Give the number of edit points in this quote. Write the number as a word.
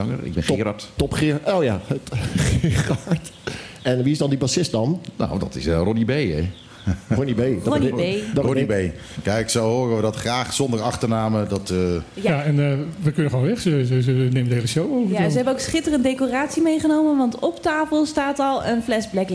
zero